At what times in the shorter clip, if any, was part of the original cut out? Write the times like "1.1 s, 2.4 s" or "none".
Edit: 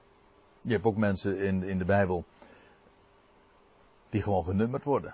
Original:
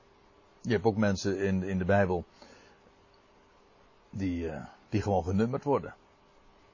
4.0 s